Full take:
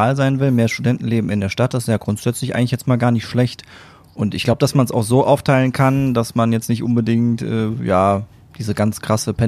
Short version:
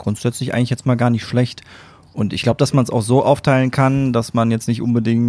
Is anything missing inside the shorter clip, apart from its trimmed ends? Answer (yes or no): no